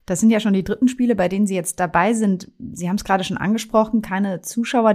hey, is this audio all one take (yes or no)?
yes